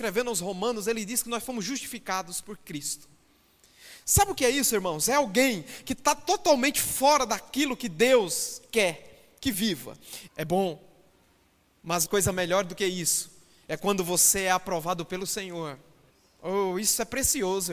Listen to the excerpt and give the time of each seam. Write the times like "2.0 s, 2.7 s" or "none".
10.3 s, 12.1 s